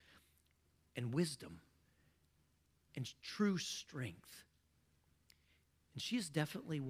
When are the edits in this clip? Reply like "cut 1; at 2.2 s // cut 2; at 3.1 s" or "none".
none